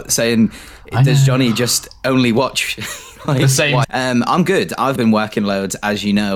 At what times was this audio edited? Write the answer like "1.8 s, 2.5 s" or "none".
3.8 s, 5.0 s